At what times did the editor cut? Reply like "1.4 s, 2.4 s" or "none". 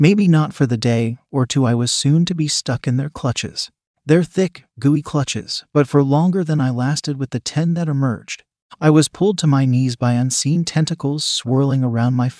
4.7 s